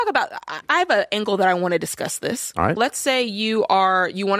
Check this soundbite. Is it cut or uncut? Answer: cut